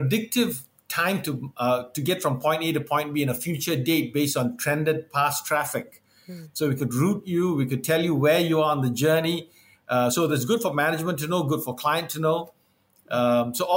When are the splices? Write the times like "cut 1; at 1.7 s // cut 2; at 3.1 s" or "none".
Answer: none

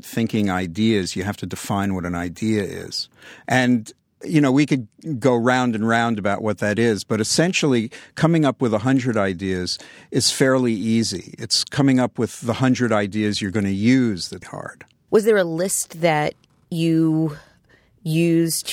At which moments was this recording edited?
cut 1; at 14.4 s

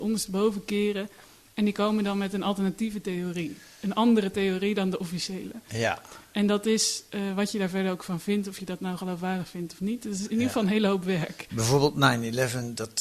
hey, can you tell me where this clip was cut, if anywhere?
none

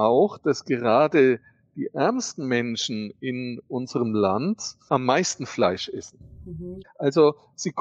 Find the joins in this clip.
cut 1; at 4.9 s // cut 2; at 6.8 s

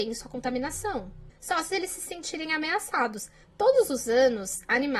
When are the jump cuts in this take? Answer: cut 1; at 1.3 s // cut 2; at 3.4 s

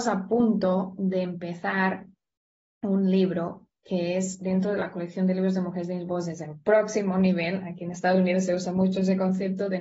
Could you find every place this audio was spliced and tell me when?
none

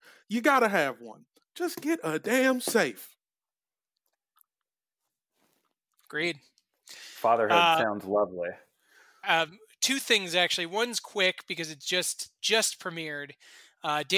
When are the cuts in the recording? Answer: cut 1; at 9.2 s

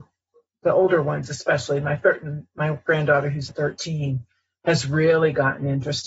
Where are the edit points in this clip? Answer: cut 1; at 3.5 s

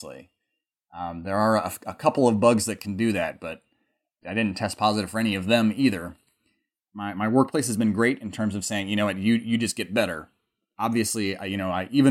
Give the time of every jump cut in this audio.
none

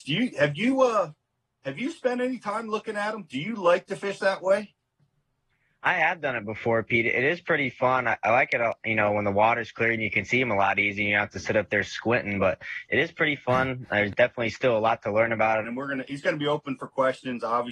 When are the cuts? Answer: cut 1; at 15.6 s

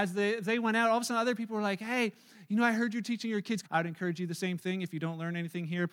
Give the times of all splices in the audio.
cut 1; at 3.6 s

